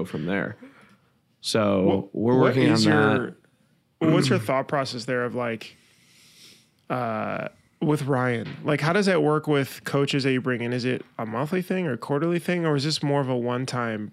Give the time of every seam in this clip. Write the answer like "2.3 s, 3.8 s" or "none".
none